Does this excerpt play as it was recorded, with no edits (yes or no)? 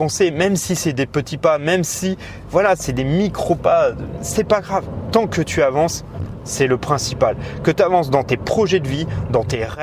yes